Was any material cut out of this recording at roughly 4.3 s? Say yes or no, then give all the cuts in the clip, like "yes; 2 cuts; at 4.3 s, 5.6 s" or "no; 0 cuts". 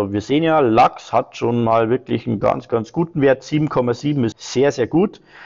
yes; 1 cut; at 4.3 s